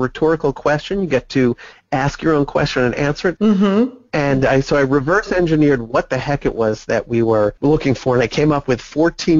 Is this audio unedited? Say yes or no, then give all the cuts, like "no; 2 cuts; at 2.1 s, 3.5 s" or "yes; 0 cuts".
no; 2 cuts; at 3.4 s, 7.6 s